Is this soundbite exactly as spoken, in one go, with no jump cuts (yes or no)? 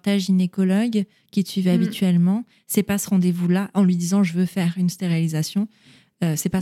yes